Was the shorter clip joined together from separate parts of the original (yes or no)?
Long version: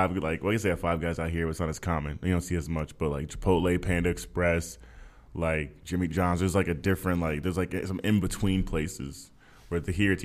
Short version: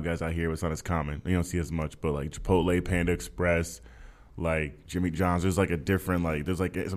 no